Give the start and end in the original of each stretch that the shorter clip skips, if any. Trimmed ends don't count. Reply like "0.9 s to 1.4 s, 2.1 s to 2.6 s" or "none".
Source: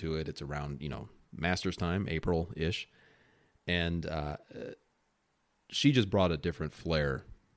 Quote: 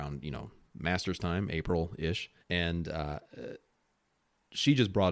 3.0 s to 3.6 s

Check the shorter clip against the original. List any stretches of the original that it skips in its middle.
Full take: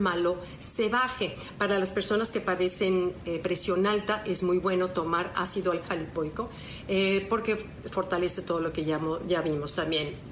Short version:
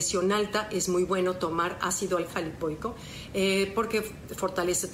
none

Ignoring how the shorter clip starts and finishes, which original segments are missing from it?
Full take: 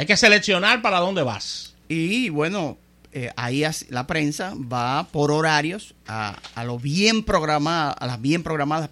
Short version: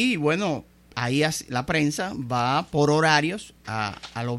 3.1 s to 3.3 s

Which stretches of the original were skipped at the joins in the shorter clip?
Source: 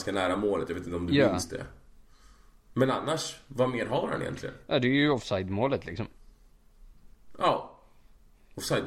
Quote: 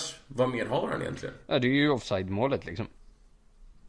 none

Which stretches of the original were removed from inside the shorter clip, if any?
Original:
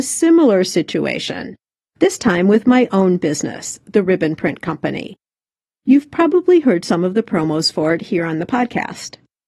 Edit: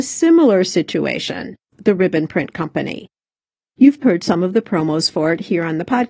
1.7 s to 3.8 s, 6.1 s to 6.6 s

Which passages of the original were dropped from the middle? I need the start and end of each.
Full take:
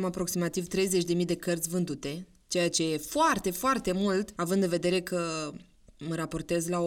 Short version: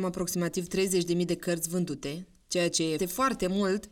3.0 s to 3.4 s

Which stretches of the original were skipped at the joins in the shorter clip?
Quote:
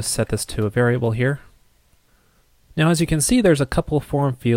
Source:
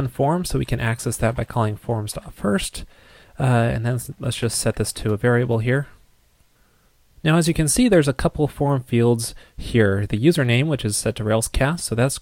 none

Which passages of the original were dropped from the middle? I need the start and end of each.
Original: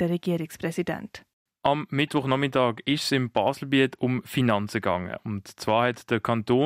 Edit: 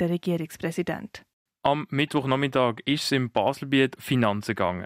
4.0 s to 4.2 s

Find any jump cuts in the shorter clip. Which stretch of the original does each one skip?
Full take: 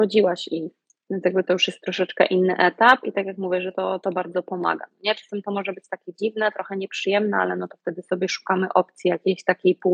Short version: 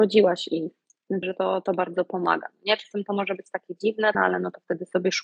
1.2 s to 3.6 s, 6.5 s to 7.3 s

